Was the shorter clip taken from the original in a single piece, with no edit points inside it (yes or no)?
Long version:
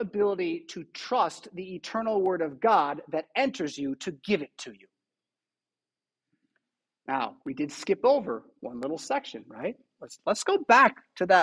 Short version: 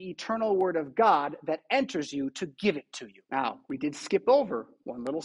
no